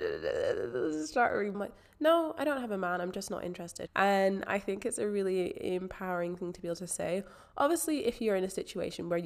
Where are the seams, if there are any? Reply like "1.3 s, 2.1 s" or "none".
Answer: 1.5 s, 3.9 s